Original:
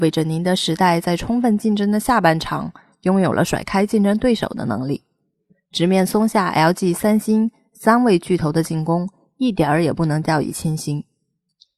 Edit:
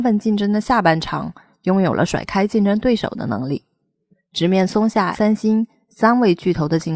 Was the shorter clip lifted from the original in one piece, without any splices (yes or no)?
no